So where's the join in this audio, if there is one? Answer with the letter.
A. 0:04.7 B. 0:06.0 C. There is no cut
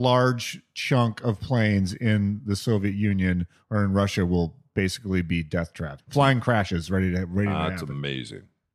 B